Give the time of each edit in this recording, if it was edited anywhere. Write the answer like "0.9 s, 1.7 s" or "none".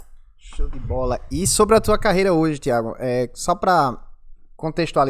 none